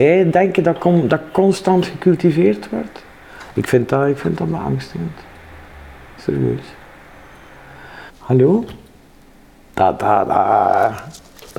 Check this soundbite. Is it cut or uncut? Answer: cut